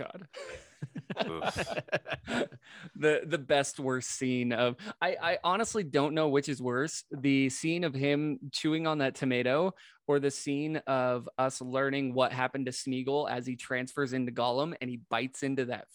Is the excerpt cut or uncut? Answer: uncut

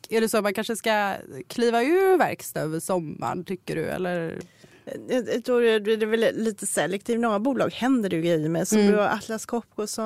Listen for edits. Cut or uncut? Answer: uncut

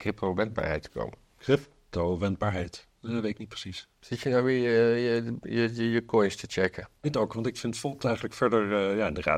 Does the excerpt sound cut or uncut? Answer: cut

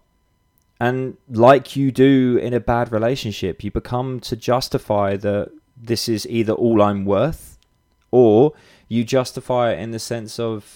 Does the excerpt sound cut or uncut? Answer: cut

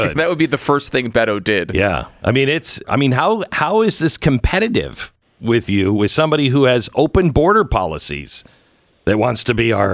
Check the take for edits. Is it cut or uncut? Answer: cut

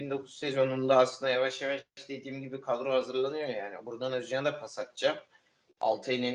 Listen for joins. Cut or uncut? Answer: uncut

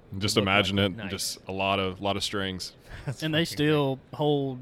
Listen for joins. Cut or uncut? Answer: cut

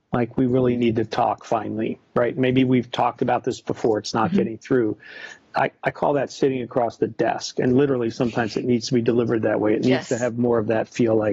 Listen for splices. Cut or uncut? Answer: uncut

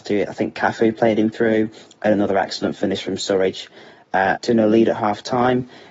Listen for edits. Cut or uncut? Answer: cut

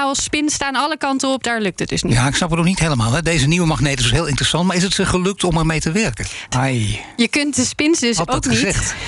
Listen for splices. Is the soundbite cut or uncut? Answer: cut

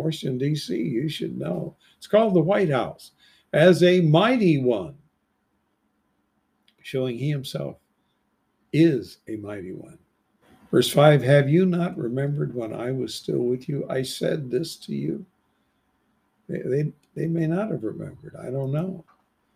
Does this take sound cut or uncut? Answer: uncut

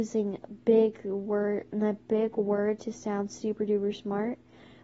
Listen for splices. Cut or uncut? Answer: uncut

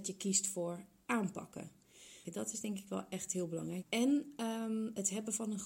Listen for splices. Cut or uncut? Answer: cut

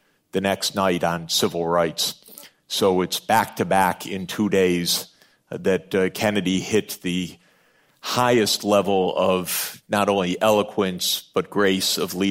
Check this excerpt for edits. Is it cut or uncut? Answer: uncut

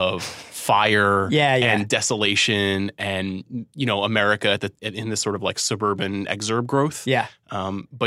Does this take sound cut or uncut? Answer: cut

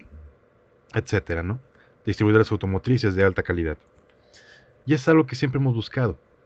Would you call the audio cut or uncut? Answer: uncut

